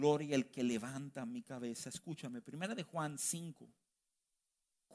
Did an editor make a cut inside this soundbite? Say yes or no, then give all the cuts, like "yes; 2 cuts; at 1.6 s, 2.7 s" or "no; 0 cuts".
no; 0 cuts